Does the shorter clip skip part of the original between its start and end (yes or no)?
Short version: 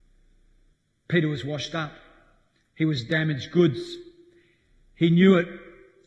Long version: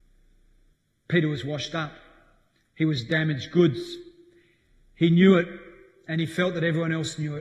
no